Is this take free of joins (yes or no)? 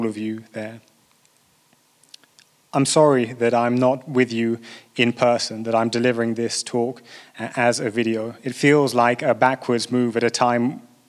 yes